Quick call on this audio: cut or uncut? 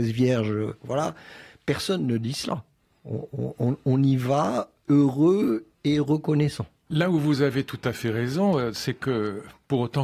cut